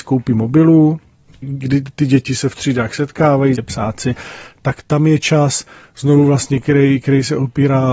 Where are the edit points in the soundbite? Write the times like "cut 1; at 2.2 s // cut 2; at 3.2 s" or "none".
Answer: cut 1; at 1.4 s // cut 2; at 3.6 s // cut 3; at 5.8 s